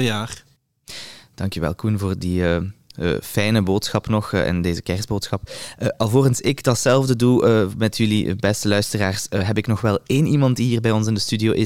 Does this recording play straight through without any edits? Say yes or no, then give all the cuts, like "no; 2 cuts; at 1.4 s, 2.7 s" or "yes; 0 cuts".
yes; 0 cuts